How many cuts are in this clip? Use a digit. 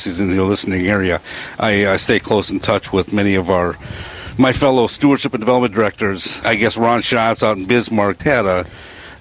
2